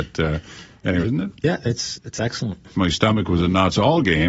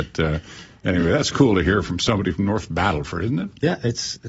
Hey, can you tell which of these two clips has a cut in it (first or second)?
first